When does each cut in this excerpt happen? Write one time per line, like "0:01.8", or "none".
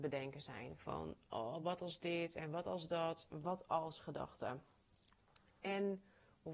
none